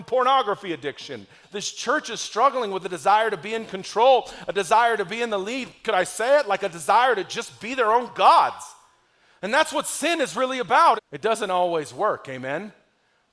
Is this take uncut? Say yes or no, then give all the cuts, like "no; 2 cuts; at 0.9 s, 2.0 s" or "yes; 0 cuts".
no; 2 cuts; at 1.4 s, 11.0 s